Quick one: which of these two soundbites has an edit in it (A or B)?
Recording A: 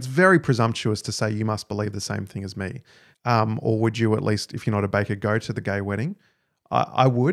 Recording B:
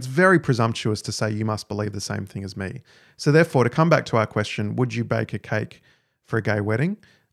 A